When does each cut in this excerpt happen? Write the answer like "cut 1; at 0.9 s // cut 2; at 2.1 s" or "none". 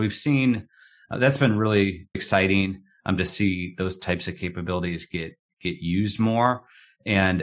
cut 1; at 2.1 s